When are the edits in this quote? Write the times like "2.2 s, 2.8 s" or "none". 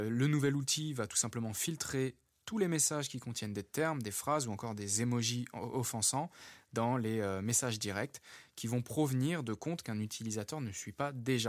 none